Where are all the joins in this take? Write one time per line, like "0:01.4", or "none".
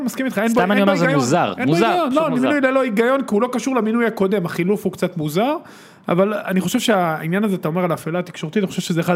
none

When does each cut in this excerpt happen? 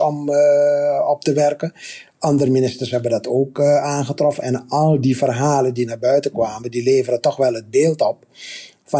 none

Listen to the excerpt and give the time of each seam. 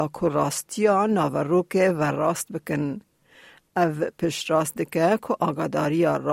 none

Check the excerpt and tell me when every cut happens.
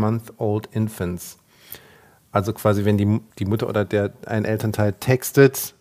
0:03.3

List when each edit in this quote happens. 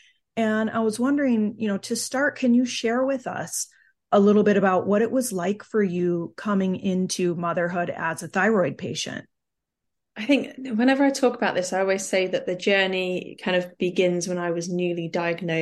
none

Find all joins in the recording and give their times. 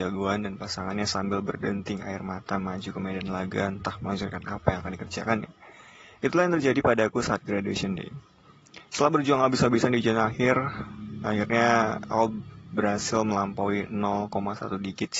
none

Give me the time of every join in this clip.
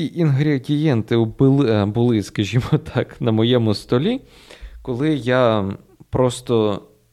none

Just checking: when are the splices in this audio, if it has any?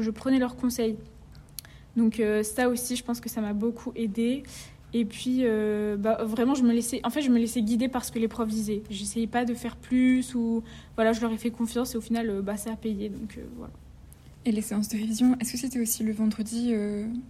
none

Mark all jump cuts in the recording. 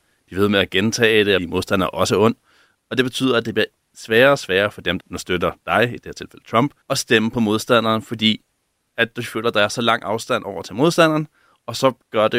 0:01.4
0:05.0
0:06.8

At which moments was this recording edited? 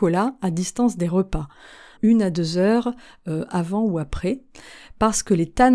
0:02.0

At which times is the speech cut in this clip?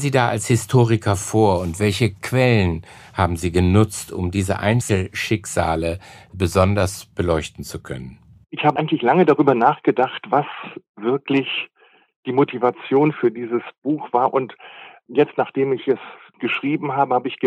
none

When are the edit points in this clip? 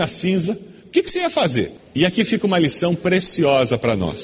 none

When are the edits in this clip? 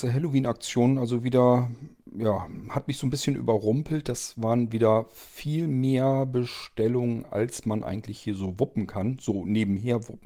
none

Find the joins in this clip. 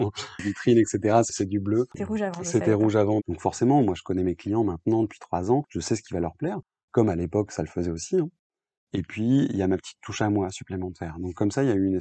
0:01.9
0:03.2

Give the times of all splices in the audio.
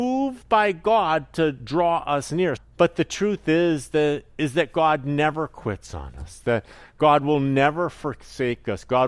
0:02.6

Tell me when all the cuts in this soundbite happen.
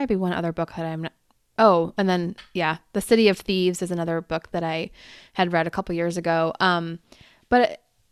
none

